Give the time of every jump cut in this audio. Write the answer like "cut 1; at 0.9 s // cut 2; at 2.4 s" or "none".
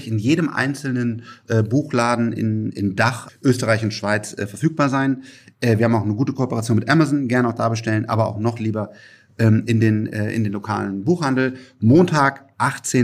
cut 1; at 3.3 s